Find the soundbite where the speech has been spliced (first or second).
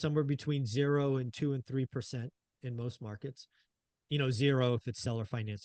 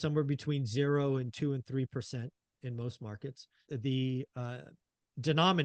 second